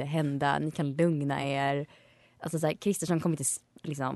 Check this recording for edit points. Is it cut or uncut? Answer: uncut